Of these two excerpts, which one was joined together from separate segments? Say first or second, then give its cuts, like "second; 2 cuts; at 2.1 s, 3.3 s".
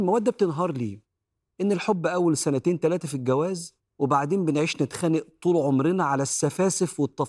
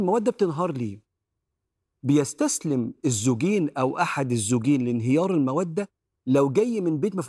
first; 2 cuts; at 1.5 s, 3.9 s